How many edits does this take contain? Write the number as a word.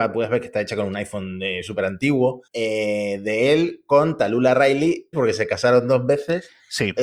two